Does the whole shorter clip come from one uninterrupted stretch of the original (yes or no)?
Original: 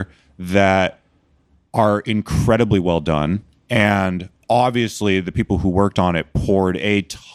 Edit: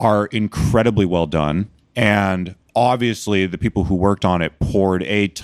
yes